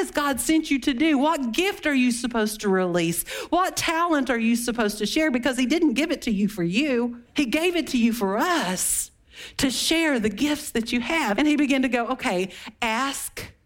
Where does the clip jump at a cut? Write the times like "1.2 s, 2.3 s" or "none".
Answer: 7.3 s, 11.4 s